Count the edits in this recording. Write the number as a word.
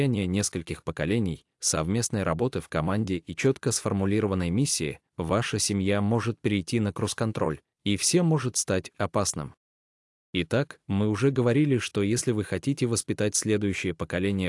one